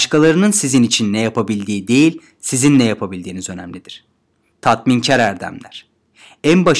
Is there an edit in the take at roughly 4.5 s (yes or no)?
yes